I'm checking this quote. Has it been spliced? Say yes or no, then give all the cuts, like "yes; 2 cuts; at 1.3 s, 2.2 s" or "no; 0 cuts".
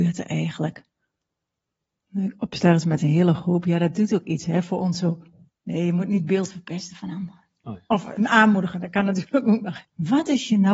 yes; 2 cuts; at 5.5 s, 9.8 s